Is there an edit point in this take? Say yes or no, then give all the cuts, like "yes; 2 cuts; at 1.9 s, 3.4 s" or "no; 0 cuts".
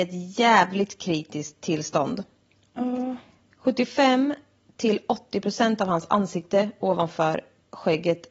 no; 0 cuts